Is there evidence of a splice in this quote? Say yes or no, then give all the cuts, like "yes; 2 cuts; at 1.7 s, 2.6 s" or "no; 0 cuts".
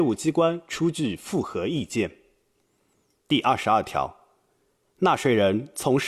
yes; 1 cut; at 3.2 s